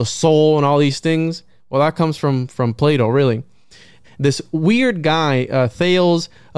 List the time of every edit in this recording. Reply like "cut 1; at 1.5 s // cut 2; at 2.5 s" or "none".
cut 1; at 4.0 s